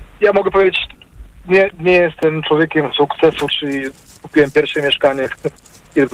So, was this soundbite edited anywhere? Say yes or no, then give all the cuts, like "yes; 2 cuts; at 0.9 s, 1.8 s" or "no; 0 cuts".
yes; 2 cuts; at 1.7 s, 3.5 s